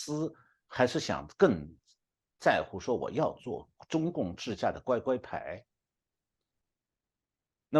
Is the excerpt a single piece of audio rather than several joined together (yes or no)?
yes